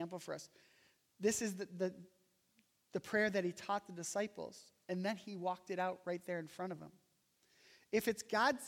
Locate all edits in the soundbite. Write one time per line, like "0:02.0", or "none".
none